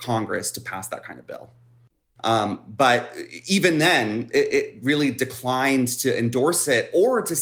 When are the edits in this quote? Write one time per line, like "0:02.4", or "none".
0:02.2